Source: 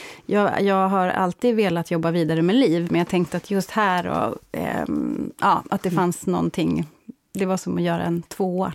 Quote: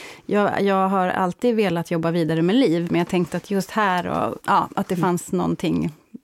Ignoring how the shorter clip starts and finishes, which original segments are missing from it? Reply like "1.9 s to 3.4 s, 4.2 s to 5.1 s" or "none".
4.4 s to 5.4 s